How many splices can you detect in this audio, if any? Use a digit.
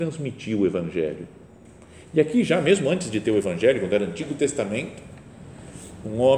0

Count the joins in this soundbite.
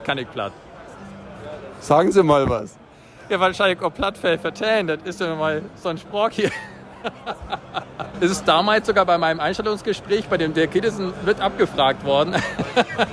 1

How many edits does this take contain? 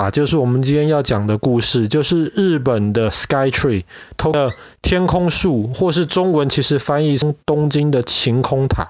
0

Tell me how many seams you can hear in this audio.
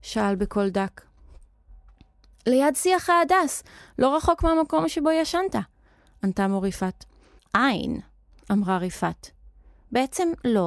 1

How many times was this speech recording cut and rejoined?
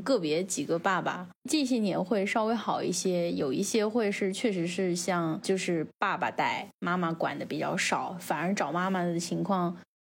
0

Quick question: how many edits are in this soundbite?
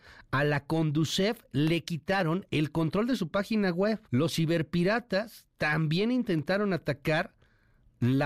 1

